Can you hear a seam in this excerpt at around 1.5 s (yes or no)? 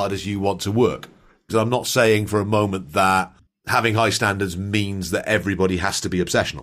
yes